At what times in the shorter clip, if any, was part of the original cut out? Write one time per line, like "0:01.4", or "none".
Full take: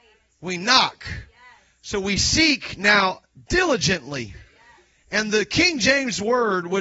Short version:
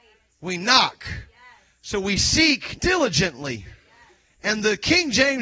0:02.8